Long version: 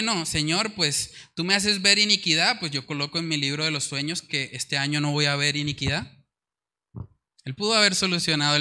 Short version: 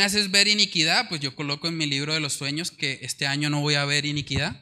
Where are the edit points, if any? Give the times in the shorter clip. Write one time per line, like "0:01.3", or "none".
none